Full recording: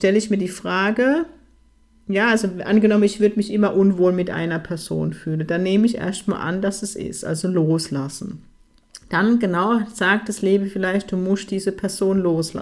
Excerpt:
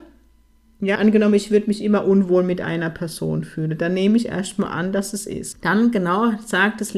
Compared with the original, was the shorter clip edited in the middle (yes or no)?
yes